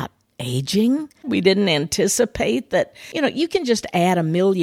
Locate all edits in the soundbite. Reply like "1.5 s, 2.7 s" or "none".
1.2 s